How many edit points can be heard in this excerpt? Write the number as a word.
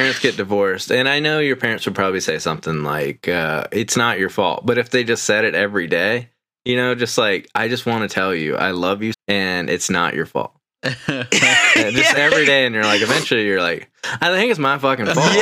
one